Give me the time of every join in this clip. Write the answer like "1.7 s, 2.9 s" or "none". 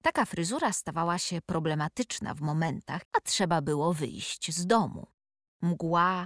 3.1 s

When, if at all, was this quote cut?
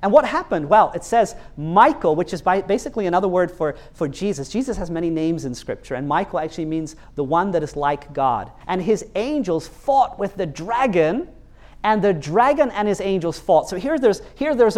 8.6 s

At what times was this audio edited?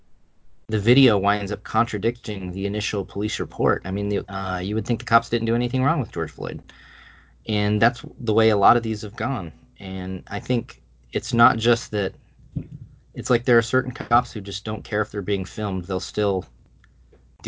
4.2 s

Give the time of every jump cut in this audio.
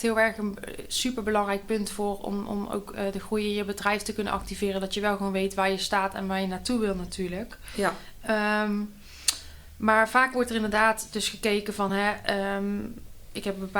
none

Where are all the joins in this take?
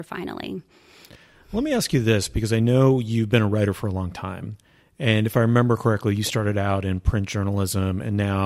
none

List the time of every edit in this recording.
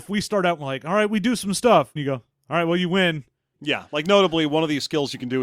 2.0 s, 3.5 s

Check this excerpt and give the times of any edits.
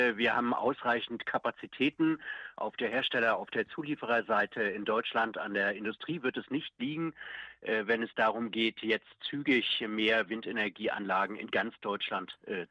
none

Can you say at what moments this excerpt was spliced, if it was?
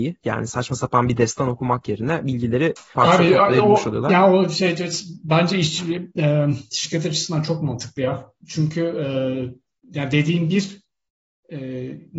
2.9 s

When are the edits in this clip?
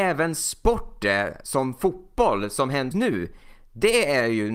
2.9 s

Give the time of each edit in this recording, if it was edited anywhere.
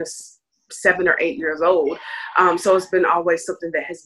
none

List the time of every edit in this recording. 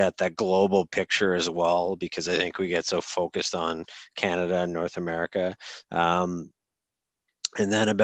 5.8 s

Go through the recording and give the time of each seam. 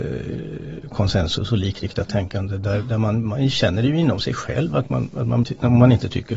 5.4 s

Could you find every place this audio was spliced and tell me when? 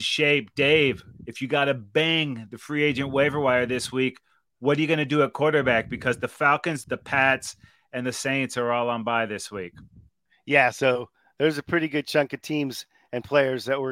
6.8 s

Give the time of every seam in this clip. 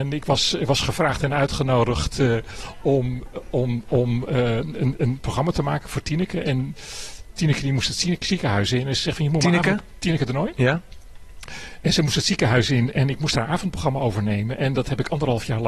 none

